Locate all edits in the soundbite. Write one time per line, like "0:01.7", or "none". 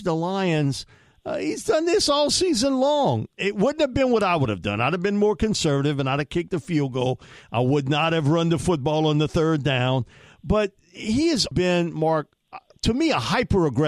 0:03.3
0:11.5

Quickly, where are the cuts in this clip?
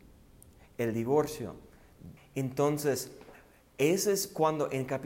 0:02.2

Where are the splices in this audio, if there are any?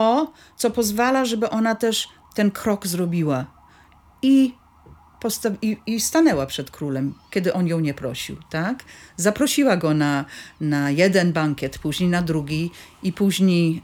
none

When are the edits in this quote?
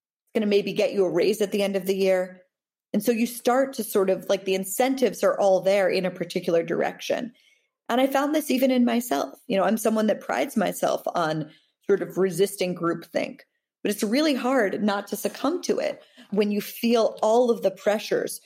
0:16.3

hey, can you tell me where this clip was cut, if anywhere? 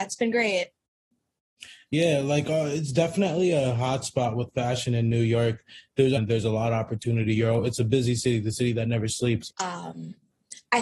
0:06.2
0:09.5

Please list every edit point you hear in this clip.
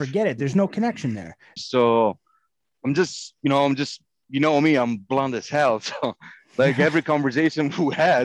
0:01.6

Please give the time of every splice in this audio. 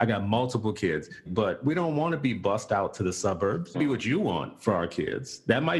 0:01.3
0:03.7

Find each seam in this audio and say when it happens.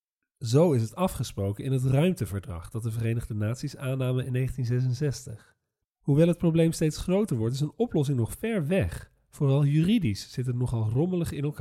0:05.8

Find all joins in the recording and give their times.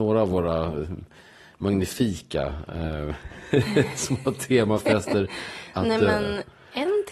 none

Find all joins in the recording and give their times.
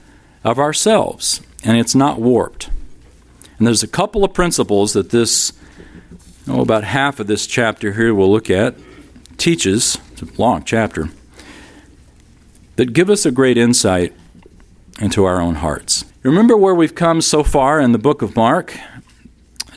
0:16.1

